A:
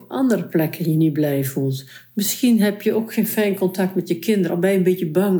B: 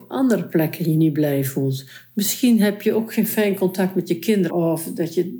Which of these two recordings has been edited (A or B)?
B